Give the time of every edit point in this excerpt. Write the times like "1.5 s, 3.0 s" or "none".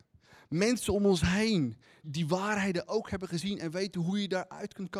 2.0 s